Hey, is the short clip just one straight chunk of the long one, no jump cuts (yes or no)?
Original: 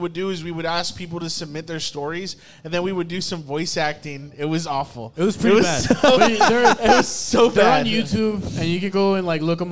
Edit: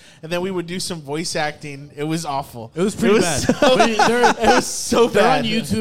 yes